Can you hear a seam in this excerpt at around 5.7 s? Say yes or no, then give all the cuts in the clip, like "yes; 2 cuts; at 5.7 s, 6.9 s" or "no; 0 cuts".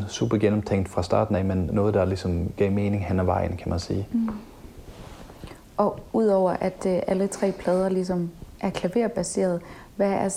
no; 0 cuts